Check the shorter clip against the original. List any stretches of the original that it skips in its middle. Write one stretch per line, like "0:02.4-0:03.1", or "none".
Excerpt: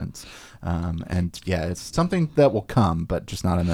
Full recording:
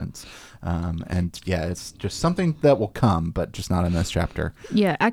0:01.9-0:02.2

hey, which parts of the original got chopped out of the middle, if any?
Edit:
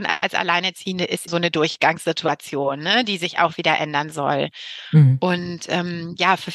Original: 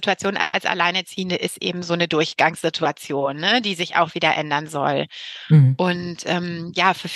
0:01.6-0:01.8

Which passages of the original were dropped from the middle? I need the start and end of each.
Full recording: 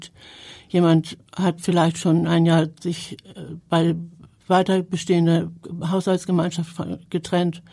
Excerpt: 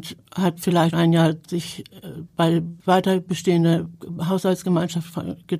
0:01.9-0:02.3
0:04.1-0:04.4

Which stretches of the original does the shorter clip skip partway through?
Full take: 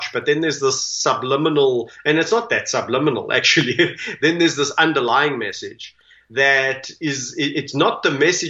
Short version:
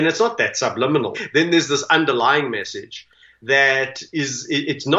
0:03.3-0:04.0

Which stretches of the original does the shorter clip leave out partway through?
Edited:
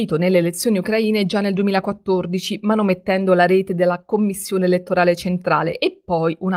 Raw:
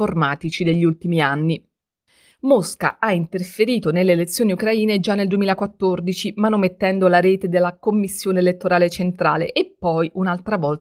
none

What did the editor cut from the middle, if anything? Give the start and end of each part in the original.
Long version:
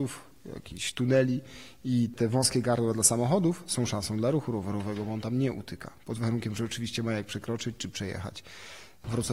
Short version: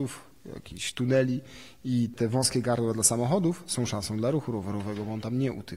none

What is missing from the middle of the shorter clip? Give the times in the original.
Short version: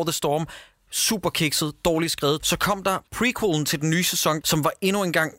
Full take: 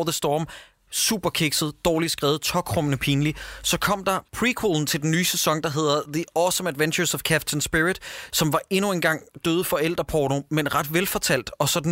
0:02.4-0:03.6
0:05.6-0:08.3

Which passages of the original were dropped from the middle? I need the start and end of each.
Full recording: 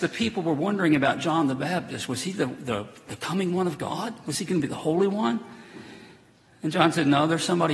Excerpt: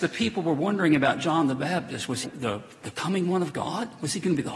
0:02.2-0:02.5

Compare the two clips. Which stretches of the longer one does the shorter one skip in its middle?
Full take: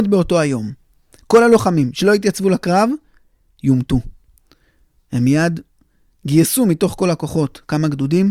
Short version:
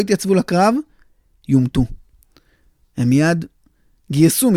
none

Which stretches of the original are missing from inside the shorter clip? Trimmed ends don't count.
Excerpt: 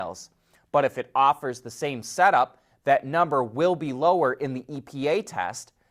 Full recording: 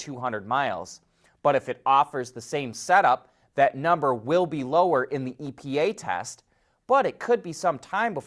none

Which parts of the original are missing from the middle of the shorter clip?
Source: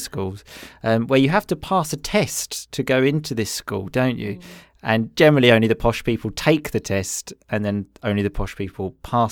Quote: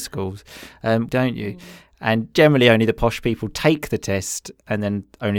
0:01.1-0:03.9

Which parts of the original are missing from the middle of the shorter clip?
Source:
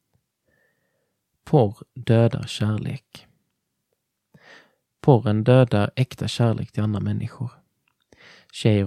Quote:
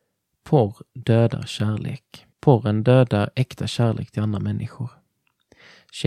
0:03.3-0:04.9

